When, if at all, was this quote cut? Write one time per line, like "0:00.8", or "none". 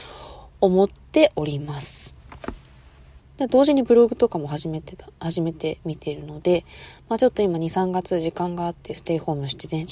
0:03.2